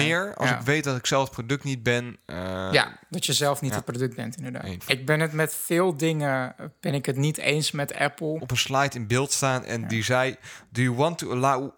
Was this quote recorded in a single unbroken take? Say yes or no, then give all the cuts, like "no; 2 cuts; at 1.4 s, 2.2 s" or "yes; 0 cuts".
no; 2 cuts; at 4.8 s, 8.4 s